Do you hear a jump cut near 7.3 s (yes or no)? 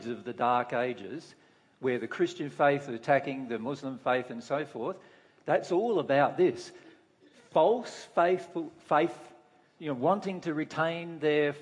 no